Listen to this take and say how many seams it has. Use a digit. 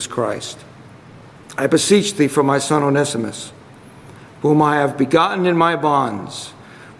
0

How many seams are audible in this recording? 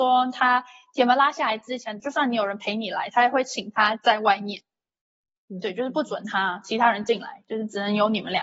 1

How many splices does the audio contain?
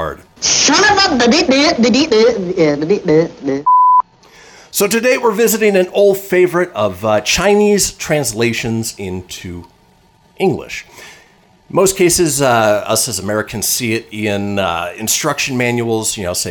0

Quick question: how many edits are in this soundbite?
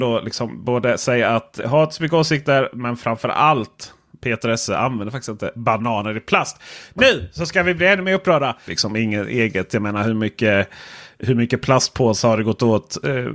2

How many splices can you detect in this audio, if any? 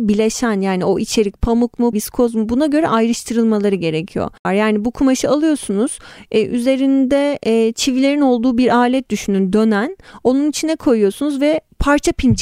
3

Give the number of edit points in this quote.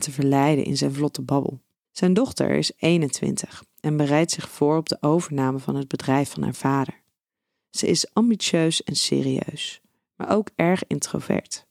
1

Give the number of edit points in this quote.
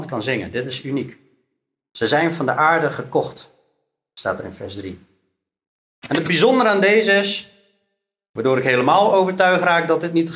0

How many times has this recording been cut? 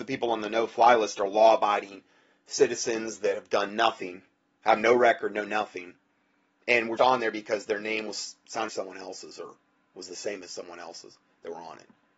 2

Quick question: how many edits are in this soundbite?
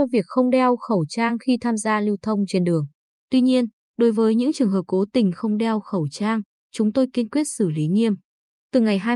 0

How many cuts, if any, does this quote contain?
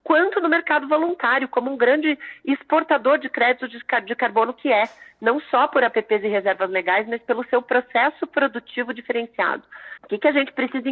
0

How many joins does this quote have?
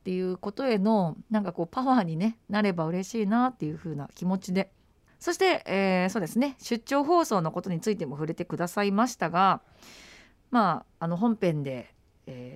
1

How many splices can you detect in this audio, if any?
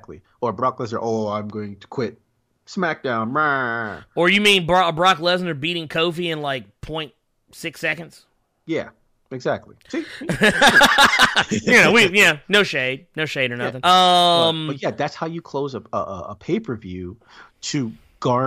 1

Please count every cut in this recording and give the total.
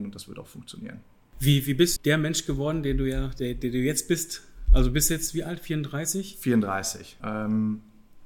2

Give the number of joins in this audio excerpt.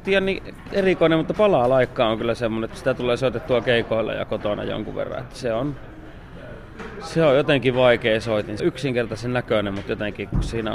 2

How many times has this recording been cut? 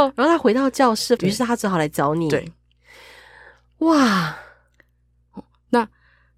1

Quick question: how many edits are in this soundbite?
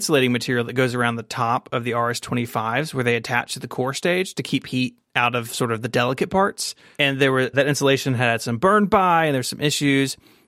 1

